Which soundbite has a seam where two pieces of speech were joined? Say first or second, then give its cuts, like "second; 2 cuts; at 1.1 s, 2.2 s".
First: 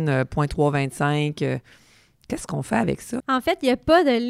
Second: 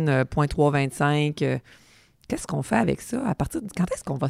first; 1 cut; at 3.2 s